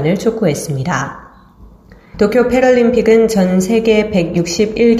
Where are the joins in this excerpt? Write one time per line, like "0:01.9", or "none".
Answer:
0:02.1